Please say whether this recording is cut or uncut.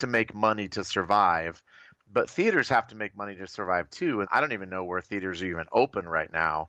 cut